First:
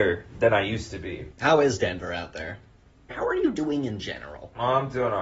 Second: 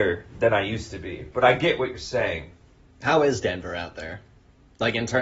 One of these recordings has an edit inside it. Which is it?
first; 2 cuts; at 1.3 s, 3.1 s

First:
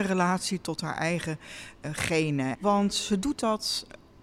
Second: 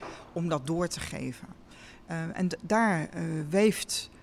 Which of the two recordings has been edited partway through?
first; 1 cut; at 2.5 s

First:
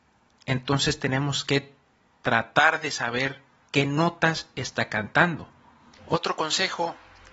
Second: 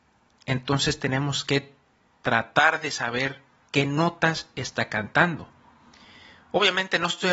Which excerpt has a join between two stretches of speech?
first; 1 cut; at 6.0 s

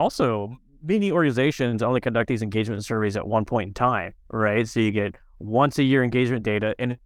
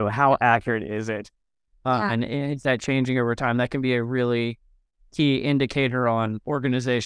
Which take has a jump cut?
second; 1 cut; at 1.7 s

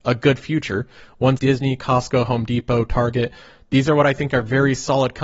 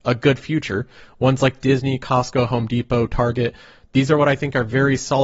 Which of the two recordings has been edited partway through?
first; 1 cut; at 1.4 s

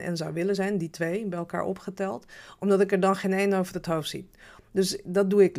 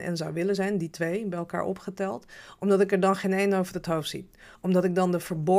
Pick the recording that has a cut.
first; 1 cut; at 4.5 s

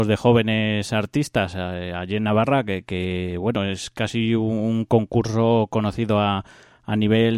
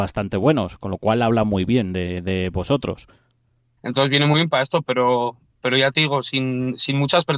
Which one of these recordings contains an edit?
second; 1 cut; at 3.8 s

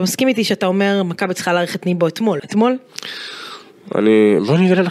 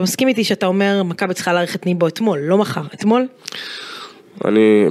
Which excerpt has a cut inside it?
first; 1 cut; at 2.4 s

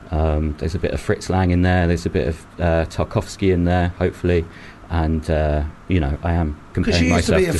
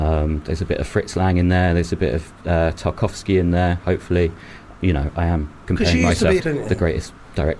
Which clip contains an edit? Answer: second; 2 cuts; at 4.7 s, 6.4 s

